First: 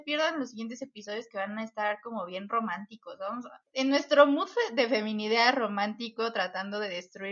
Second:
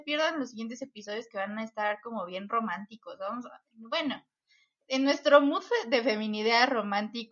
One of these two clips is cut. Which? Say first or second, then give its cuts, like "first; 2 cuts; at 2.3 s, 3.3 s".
first; 1 cut; at 3.6 s